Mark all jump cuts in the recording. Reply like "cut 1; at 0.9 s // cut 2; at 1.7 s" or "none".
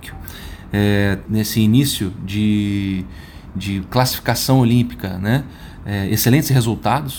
cut 1; at 1.3 s